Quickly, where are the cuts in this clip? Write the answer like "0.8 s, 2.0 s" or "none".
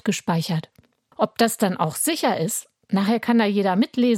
1.1 s